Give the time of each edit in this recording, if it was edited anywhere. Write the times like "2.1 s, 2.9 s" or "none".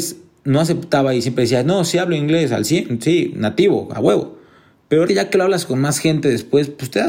5.1 s

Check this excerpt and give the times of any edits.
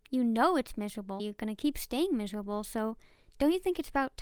1.2 s

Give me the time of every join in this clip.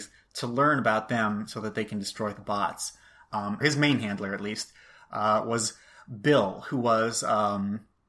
3.6 s

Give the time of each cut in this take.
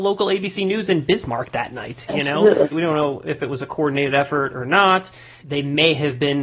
2.7 s, 5.4 s

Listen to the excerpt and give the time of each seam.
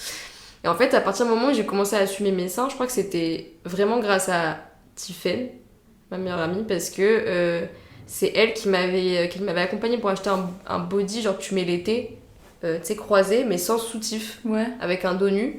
none

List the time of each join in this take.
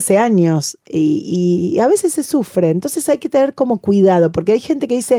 none

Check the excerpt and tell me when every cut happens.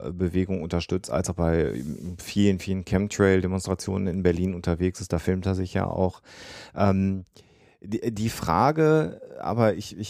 none

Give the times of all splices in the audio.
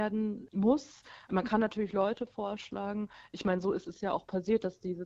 none

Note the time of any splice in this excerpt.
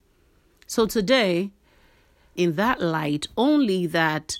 2.4 s

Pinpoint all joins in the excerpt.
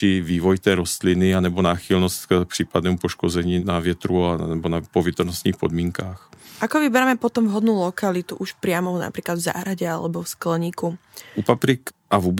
none

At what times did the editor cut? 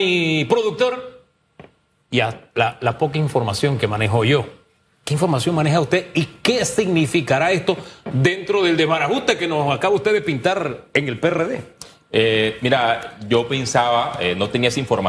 none

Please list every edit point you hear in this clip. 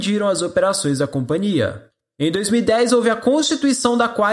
none

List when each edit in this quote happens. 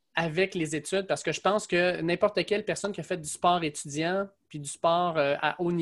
none

